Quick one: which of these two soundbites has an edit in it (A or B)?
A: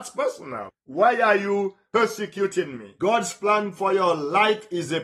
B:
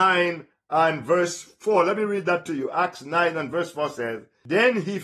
A